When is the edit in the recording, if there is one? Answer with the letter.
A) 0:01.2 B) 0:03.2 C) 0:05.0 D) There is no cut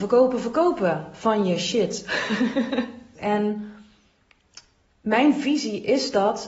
B